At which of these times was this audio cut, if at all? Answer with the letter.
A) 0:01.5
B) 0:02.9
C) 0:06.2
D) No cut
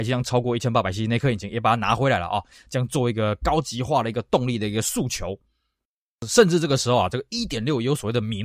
D